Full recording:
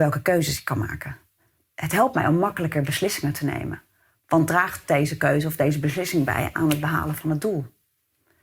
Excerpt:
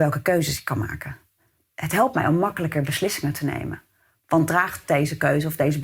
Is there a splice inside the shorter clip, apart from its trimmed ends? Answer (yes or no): no